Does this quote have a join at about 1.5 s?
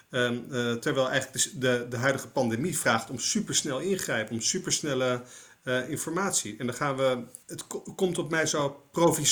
no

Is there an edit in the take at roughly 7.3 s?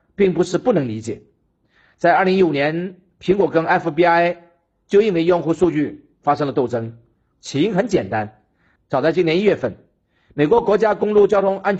yes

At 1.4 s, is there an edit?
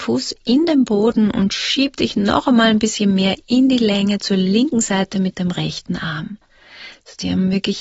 no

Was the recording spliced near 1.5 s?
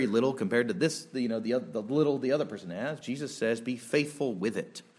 no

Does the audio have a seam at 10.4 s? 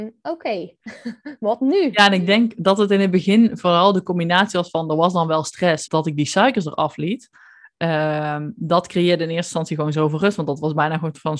no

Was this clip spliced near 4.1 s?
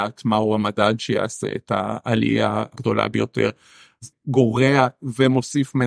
yes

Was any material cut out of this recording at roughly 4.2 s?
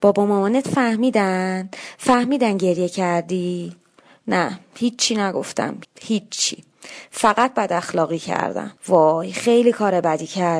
no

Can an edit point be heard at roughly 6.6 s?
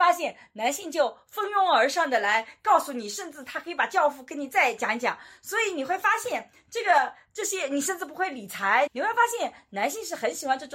no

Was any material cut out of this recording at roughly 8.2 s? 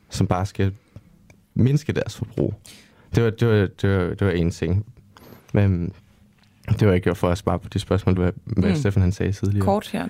yes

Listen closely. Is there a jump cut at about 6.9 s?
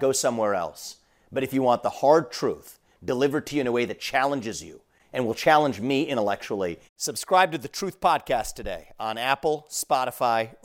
yes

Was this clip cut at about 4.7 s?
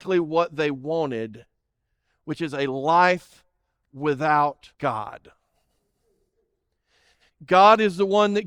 yes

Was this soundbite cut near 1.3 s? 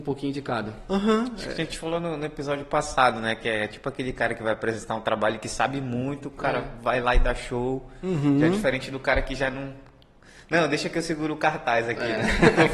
no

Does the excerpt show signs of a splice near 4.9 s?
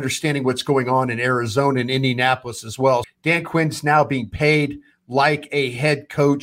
no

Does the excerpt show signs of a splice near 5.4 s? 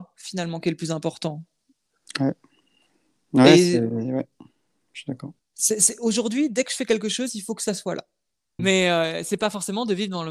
yes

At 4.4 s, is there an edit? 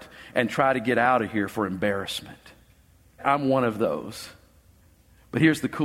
no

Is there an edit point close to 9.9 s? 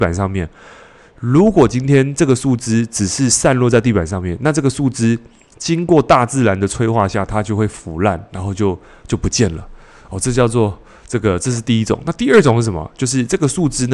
no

